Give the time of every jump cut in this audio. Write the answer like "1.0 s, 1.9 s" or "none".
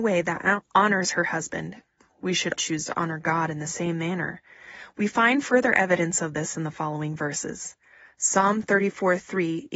2.6 s, 4.9 s